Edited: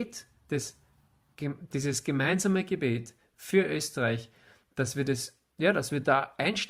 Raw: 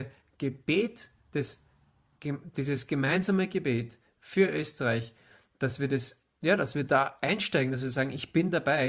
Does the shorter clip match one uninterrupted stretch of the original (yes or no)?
yes